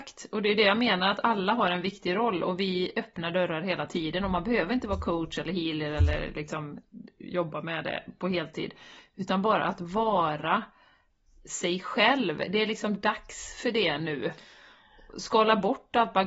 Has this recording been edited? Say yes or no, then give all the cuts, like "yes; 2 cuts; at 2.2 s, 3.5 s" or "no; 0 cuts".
no; 0 cuts